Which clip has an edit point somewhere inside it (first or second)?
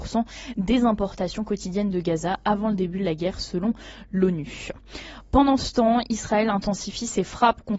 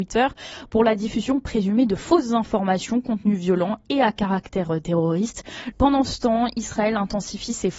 second